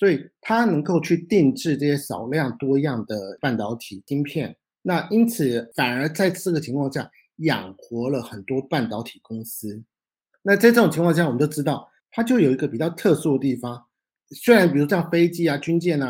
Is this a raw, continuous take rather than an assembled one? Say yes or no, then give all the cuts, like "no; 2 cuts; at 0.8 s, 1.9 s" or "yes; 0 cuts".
no; 2 cuts; at 12.0 s, 14.2 s